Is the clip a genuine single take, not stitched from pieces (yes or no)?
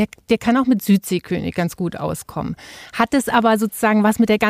yes